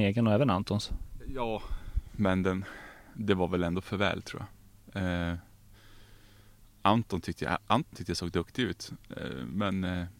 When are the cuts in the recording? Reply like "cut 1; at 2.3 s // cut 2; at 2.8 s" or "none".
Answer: none